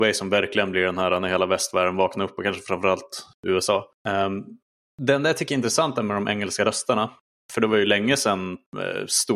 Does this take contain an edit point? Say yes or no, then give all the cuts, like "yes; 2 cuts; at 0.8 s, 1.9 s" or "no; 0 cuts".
no; 0 cuts